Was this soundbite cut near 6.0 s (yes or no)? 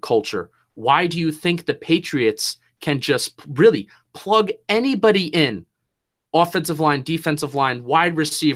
no